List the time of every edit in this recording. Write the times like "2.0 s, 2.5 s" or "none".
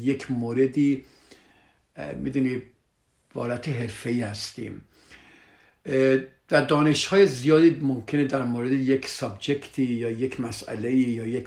none